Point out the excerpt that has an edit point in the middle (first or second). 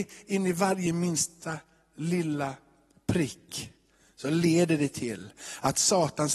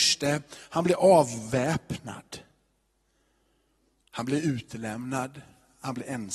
second